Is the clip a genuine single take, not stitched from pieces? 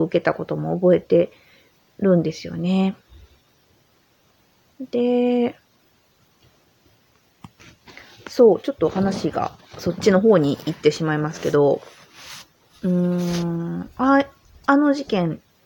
yes; 0 cuts

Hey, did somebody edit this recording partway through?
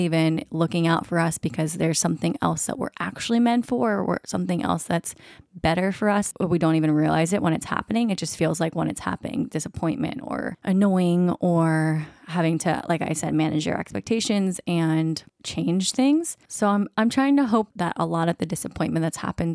no; 0 cuts

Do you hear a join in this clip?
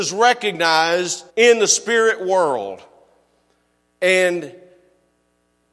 yes; 1 cut; at 1.3 s

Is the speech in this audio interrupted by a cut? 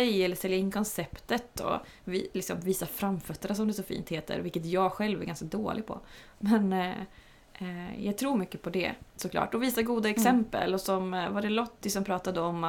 no; 0 cuts

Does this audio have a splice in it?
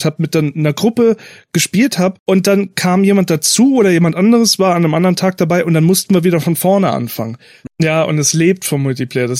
yes; 2 cuts; at 2.2 s, 7.7 s

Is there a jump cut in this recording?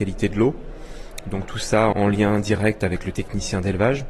yes; 1 cut; at 1.9 s

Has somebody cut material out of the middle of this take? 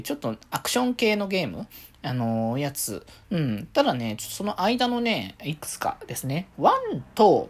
yes; 1 cut; at 3.2 s

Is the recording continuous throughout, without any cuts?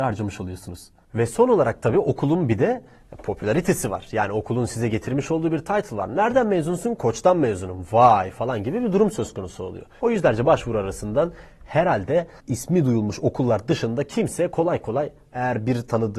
no; 1 cut; at 10.0 s

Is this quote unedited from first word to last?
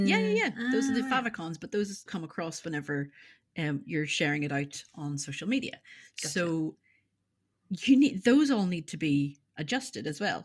no; 1 cut; at 2.1 s

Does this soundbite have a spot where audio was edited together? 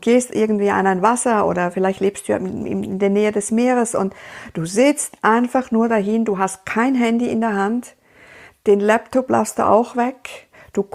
no; 0 cuts

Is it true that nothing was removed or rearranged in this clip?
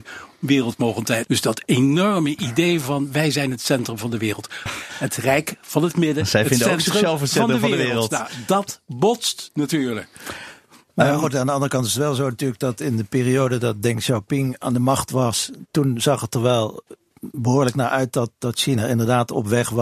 no; 2 cuts; at 1.2 s, 4.7 s

